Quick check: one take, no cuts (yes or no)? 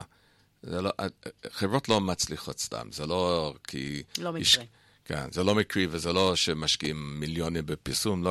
yes